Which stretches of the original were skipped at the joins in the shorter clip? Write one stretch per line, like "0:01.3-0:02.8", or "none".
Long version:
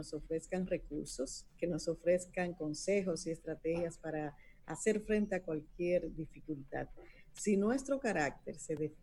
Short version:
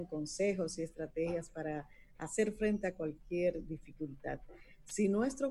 none